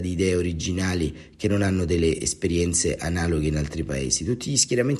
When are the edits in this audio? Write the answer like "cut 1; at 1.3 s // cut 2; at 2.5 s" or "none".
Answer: none

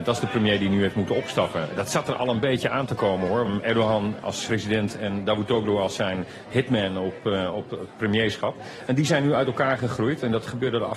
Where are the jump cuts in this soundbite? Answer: cut 1; at 3.4 s // cut 2; at 4.5 s

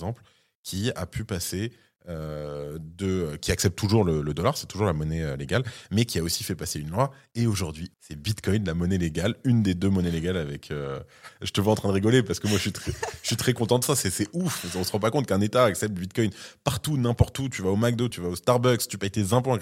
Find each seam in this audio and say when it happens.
cut 1; at 7.9 s // cut 2; at 18.1 s

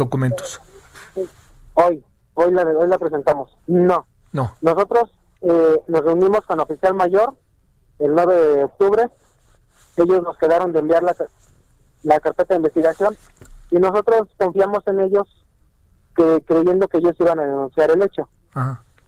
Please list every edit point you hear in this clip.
cut 1; at 3.6 s

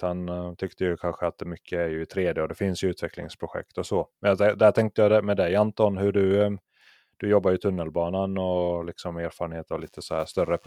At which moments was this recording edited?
none

